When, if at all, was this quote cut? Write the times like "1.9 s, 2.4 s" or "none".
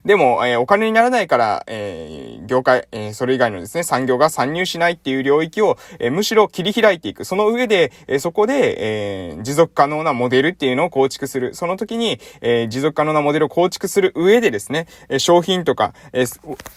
none